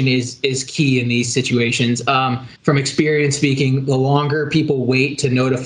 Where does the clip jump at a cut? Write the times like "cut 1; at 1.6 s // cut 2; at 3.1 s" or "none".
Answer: cut 1; at 2.5 s